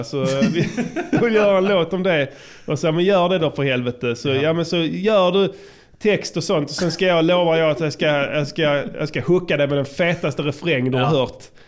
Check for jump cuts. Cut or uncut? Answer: uncut